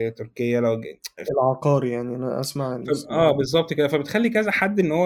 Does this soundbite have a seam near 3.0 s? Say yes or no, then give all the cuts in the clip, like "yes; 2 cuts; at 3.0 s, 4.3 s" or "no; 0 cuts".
no; 1 cut; at 1.2 s